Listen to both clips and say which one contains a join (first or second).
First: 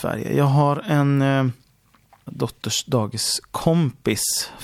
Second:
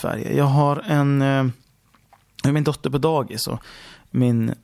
first